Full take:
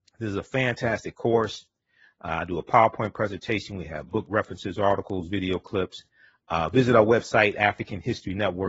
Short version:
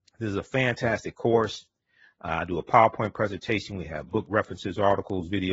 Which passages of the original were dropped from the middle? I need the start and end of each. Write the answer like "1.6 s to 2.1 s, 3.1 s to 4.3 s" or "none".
none